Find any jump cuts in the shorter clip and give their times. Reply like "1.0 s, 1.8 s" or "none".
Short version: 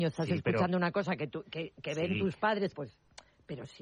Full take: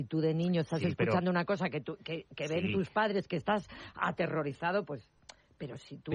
2.7 s